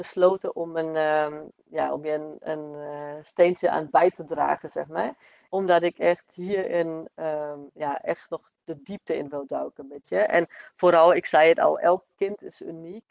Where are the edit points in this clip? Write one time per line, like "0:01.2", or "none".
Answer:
0:05.5